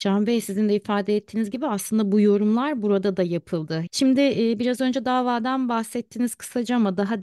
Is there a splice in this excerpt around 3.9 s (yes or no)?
yes